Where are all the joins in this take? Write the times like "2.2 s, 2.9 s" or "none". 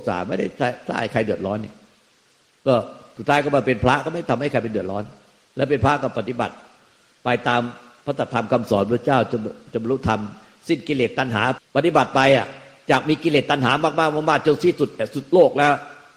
11.6 s